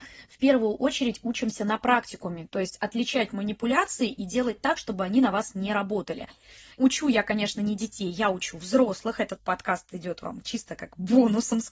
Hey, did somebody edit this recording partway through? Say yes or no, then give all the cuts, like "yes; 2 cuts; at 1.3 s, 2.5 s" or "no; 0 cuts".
no; 0 cuts